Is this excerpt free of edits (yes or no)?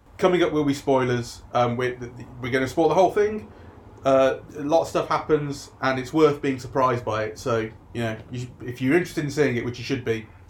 no